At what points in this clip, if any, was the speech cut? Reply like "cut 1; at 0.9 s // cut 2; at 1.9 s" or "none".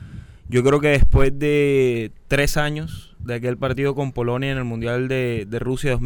none